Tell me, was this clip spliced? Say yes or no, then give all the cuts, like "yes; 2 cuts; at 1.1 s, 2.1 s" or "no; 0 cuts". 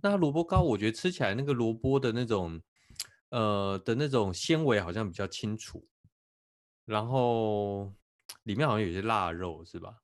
no; 0 cuts